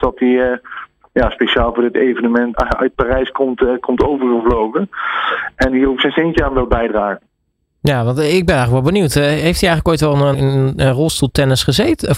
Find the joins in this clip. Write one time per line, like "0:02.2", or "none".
0:02.5
0:10.3